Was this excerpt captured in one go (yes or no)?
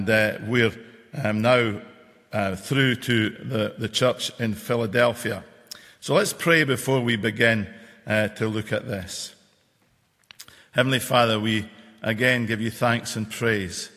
yes